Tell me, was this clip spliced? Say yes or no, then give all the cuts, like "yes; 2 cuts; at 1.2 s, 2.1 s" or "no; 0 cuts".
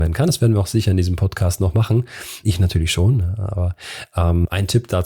yes; 1 cut; at 2.4 s